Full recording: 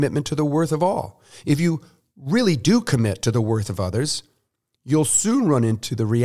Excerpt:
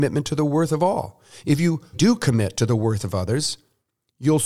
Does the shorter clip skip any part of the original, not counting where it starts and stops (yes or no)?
yes